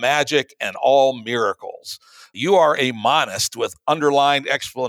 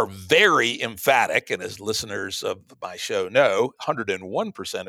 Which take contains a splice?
second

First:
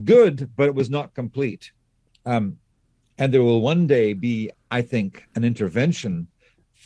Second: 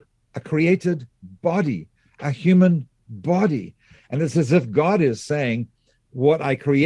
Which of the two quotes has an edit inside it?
first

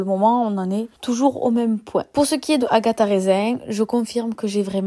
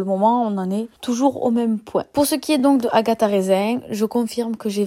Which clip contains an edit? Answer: first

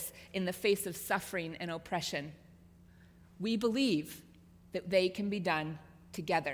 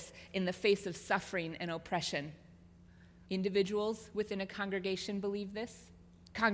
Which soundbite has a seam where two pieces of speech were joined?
second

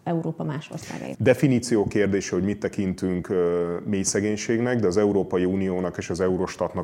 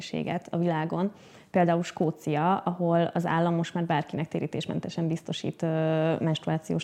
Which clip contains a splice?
first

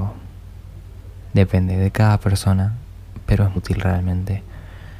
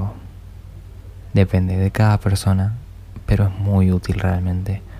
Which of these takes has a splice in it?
first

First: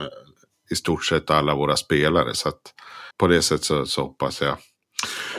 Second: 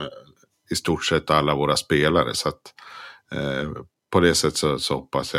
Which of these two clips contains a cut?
first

